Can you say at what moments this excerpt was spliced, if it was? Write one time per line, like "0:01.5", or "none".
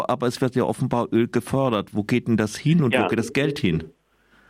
none

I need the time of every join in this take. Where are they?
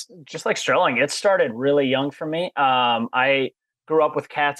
none

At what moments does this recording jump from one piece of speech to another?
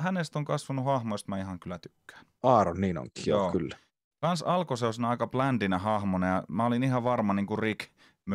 0:02.4

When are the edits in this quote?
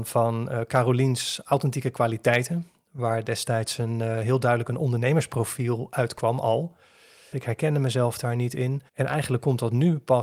0:07.3
0:08.9

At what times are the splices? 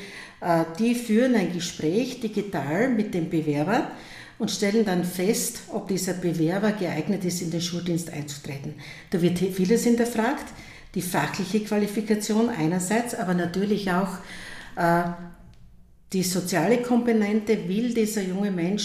none

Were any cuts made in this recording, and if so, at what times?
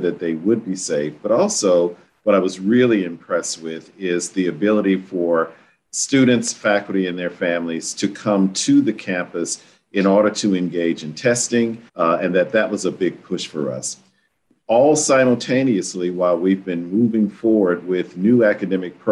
0:11.9

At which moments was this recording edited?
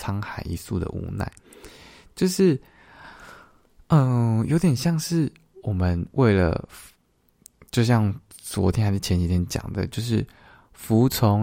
none

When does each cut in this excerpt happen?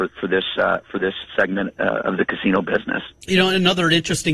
none

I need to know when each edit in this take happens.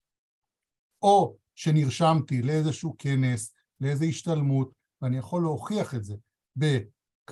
none

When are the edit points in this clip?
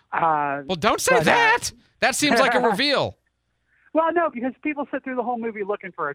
0:04.3

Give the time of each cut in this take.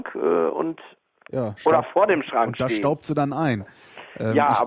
none

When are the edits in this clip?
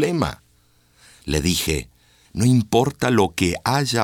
0:02.3

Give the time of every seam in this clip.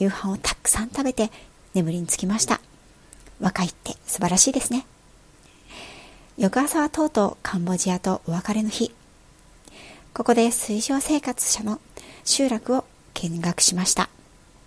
0:10.1

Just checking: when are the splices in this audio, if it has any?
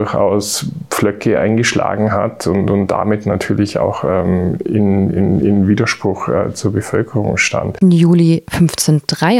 0:07.8

